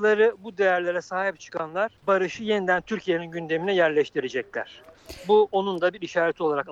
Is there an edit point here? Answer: yes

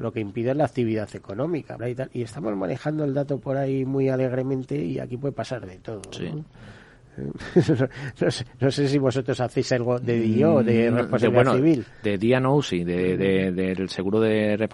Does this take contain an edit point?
yes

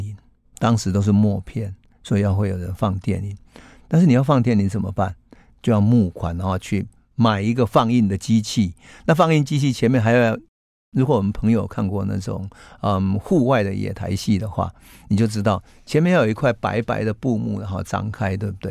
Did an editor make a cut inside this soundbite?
no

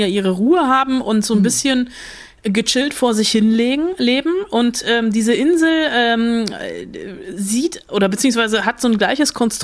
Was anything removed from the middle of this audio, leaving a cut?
yes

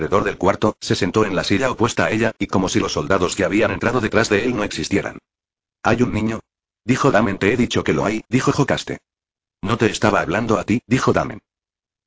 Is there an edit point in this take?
no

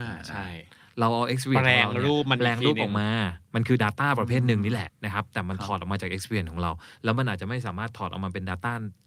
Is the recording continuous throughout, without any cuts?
no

